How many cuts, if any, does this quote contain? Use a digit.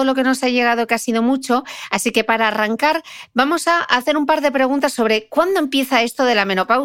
0